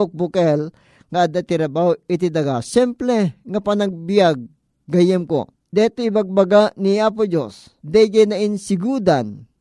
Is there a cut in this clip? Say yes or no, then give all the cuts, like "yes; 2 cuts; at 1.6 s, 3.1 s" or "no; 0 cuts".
yes; 1 cut; at 7.8 s